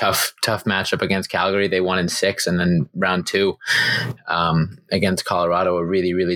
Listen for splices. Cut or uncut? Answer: uncut